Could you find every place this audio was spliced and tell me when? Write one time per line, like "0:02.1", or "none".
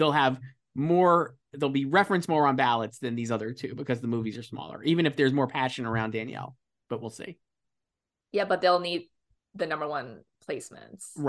none